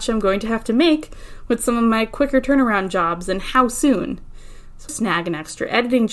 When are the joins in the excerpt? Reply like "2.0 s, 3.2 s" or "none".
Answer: 4.9 s